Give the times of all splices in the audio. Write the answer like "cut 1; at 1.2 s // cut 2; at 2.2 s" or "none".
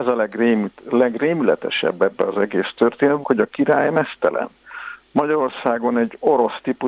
cut 1; at 3.2 s

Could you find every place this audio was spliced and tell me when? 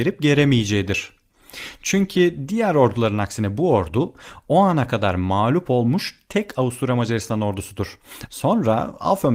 cut 1; at 8.3 s

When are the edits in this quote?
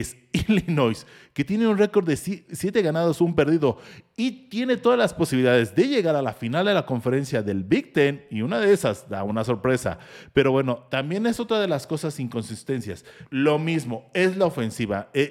cut 1; at 13.3 s

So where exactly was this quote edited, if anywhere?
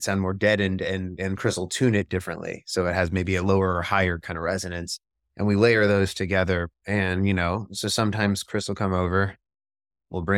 cut 1; at 6.7 s

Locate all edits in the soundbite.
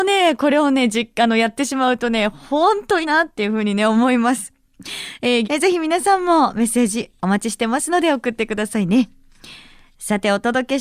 cut 1; at 3.0 s // cut 2; at 5.4 s

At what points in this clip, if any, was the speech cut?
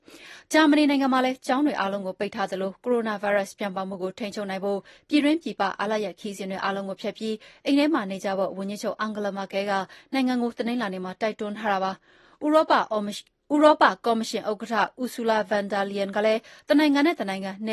none

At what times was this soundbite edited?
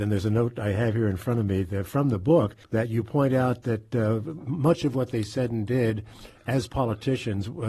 cut 1; at 2.6 s

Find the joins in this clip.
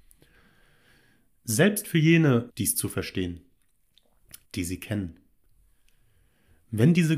cut 1; at 2.5 s // cut 2; at 4.4 s

